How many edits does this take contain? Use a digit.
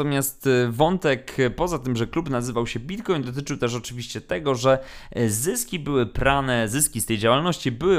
0